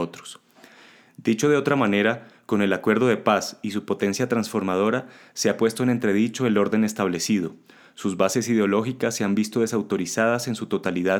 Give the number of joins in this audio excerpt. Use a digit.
0